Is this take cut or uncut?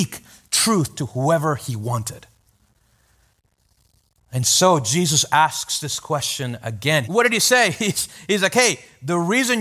cut